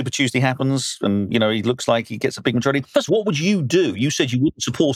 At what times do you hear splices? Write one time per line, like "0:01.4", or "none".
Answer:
0:03.1